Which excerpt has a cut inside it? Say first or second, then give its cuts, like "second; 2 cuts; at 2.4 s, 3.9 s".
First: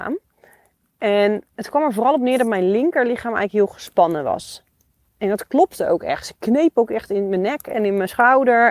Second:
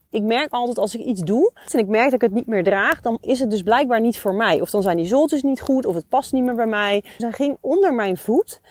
second; 2 cuts; at 1.7 s, 7.2 s